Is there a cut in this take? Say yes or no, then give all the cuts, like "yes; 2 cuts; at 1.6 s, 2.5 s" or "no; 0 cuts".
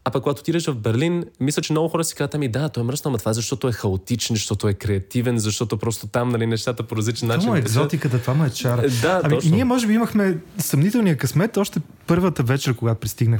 no; 0 cuts